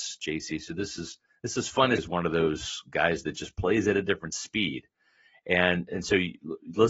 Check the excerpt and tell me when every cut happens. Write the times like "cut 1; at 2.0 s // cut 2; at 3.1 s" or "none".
cut 1; at 2.0 s